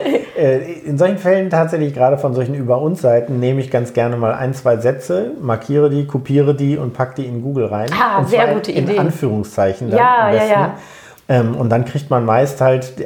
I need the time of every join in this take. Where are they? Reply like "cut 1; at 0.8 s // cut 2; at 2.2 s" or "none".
cut 1; at 11.2 s